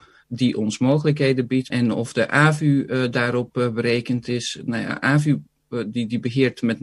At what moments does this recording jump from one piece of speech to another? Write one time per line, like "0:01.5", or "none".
0:01.7